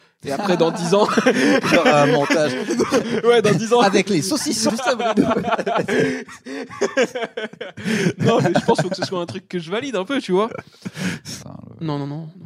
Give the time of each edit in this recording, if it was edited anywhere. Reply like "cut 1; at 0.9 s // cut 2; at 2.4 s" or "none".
cut 1; at 4.7 s // cut 2; at 11.4 s